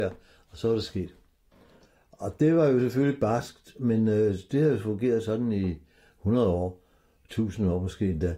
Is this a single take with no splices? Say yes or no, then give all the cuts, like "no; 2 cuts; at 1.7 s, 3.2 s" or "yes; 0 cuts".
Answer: yes; 0 cuts